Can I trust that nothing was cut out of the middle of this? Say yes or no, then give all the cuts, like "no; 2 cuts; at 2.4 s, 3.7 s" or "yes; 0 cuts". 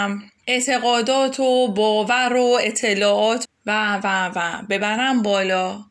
no; 1 cut; at 3.4 s